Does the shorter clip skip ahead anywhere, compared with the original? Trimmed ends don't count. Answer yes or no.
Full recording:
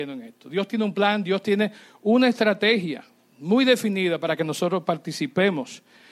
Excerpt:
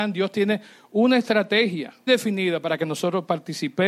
yes